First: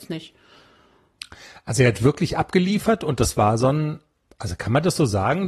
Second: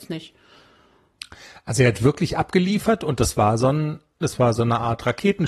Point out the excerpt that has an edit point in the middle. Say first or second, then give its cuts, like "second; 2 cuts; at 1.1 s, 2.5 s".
second; 1 cut; at 4.2 s